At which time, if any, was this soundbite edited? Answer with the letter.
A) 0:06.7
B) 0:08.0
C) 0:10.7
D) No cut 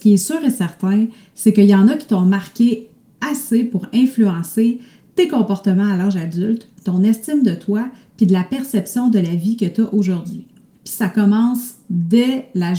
C